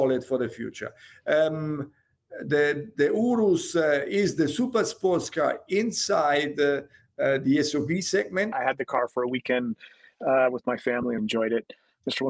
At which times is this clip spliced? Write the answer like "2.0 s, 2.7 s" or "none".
8.5 s, 11.2 s

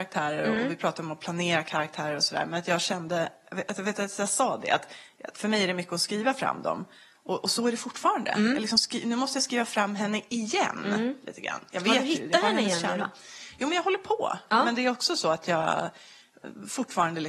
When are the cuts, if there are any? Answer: none

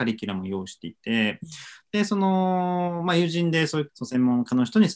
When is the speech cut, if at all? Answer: 3.9 s

